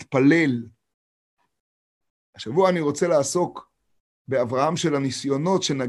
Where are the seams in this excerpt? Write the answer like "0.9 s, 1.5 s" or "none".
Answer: none